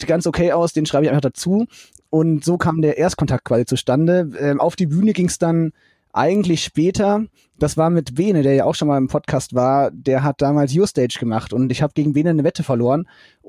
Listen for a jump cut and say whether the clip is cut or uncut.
uncut